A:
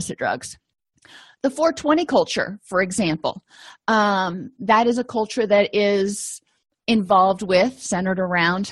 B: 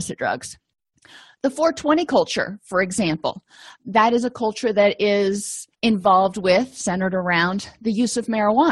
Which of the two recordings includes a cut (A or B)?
B